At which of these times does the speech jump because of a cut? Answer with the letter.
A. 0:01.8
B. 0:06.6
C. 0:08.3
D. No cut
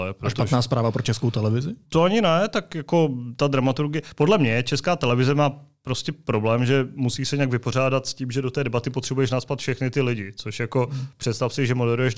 A